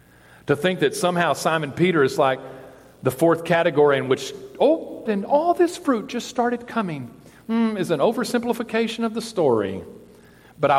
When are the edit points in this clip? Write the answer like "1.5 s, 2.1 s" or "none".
5.1 s